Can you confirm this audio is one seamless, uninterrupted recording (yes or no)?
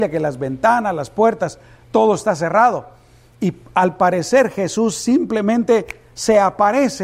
yes